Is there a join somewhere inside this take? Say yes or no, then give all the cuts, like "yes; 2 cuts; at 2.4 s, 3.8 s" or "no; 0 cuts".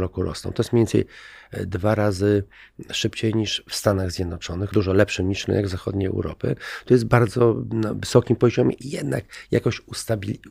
yes; 1 cut; at 4.7 s